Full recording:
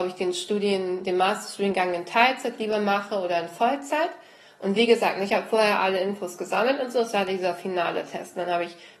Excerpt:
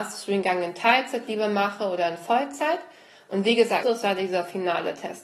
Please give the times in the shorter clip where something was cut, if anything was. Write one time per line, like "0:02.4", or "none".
0:03.8